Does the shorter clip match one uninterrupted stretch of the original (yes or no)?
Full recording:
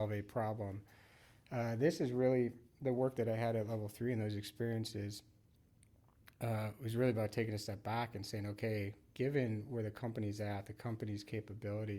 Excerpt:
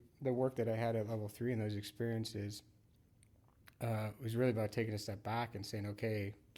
yes